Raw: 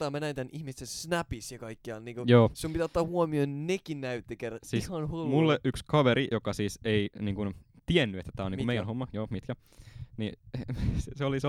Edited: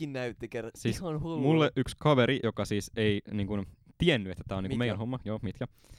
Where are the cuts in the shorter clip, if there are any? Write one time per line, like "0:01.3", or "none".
none